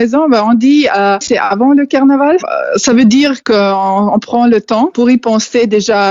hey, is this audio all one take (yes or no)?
no